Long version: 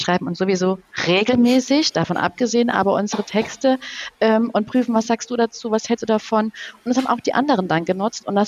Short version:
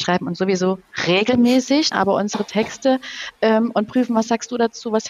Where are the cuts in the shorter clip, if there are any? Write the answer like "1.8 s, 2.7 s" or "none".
1.9 s